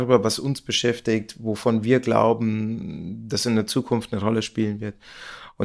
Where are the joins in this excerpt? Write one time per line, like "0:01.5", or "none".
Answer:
none